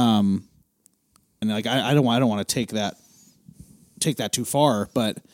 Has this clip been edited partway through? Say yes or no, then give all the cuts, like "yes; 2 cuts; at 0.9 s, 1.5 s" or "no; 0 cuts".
yes; 1 cut; at 1.4 s